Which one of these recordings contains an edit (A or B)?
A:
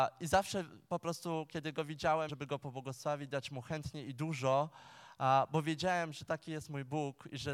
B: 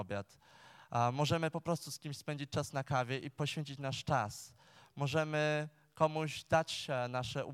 A